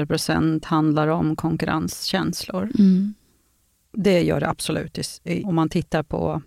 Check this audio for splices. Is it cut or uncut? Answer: cut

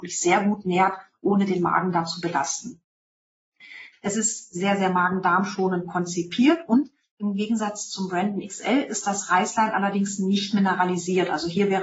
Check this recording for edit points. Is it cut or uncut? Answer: cut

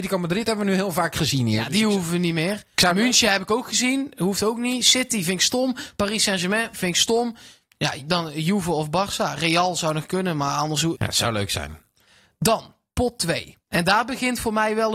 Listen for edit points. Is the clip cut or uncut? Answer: cut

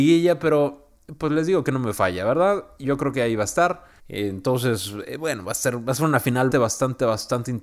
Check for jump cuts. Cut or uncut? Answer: cut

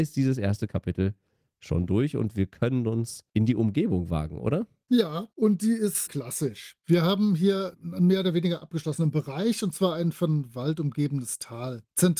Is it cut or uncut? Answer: uncut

